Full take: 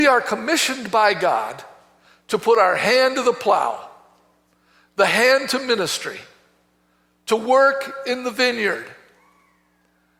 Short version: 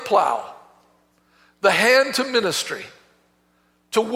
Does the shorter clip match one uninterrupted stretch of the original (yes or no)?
yes